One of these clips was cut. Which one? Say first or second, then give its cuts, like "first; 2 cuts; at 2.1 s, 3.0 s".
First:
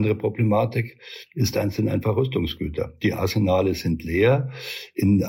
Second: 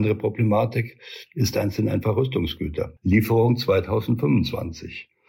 second; 1 cut; at 3.0 s